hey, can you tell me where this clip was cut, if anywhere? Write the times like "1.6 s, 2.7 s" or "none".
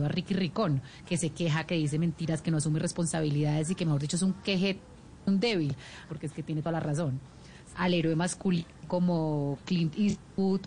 6.1 s, 7.7 s